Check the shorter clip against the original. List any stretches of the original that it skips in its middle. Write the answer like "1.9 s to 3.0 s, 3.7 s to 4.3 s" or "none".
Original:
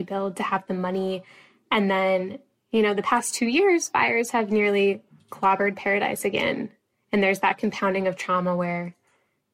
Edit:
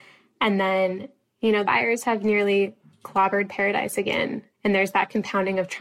2.9 s to 3.9 s, 6.8 s to 7.0 s